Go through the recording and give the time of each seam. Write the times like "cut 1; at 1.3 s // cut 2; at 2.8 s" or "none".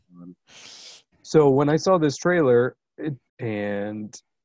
cut 1; at 1.1 s // cut 2; at 3.3 s